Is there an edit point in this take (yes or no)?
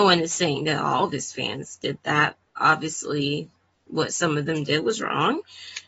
yes